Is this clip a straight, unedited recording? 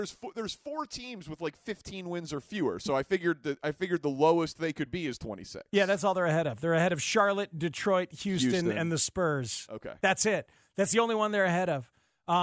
yes; 0 cuts

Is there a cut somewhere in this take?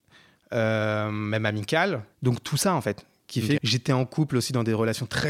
yes; 2 cuts; at 2.1 s, 3.6 s

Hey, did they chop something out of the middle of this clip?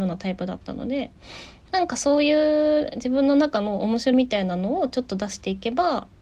yes; 1 cut; at 4.1 s

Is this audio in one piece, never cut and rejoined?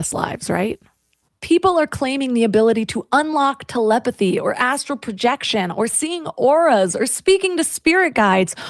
no; 1 cut; at 1.3 s

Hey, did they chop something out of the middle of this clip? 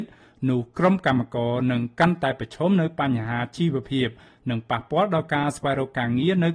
no; 0 cuts

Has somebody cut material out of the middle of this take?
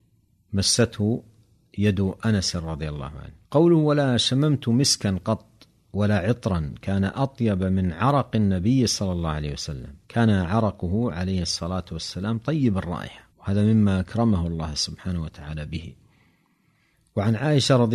yes; 3 cuts; at 3.4 s, 10.0 s, 13.3 s

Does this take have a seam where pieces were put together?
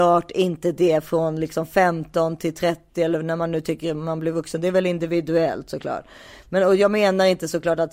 no; 0 cuts

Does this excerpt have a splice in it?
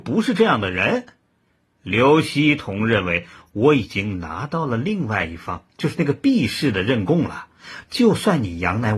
yes; 1 cut; at 7.9 s

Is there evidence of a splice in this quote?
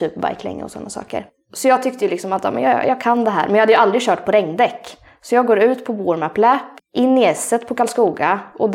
yes; 1 cut; at 6.8 s

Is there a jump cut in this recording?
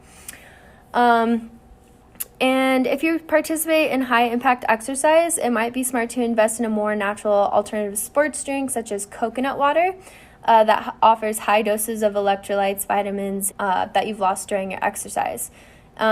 yes; 1 cut; at 13.5 s

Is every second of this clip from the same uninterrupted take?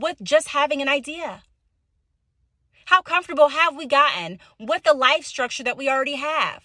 yes; 0 cuts

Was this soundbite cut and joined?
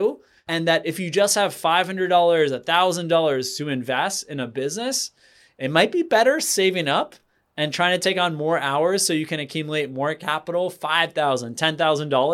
no; 0 cuts

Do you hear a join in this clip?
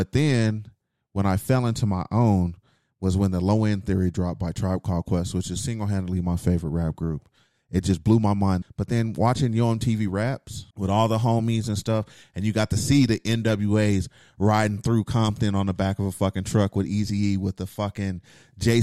yes; 2 cuts; at 8.6 s, 10.7 s

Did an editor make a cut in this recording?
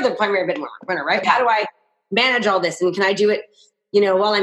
yes; 1 cut; at 1.2 s

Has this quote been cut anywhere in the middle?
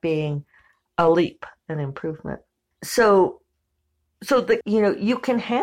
yes; 2 cuts; at 2.7 s, 4.6 s

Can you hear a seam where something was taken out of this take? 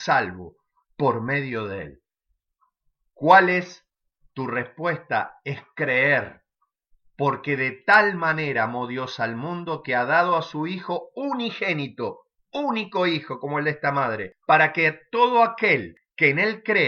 no; 0 cuts

